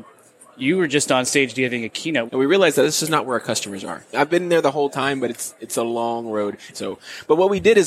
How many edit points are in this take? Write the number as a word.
three